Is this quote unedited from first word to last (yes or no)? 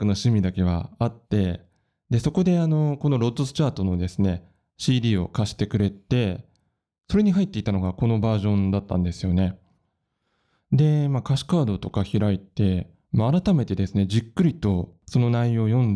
yes